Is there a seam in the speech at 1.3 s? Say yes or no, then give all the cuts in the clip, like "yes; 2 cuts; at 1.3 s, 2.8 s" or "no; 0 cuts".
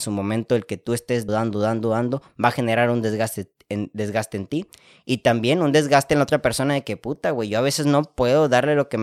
yes; 1 cut; at 1.3 s